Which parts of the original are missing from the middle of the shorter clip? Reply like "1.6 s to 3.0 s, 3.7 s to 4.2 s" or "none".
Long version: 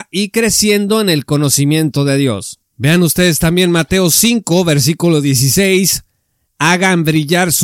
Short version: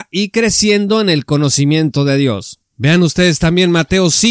none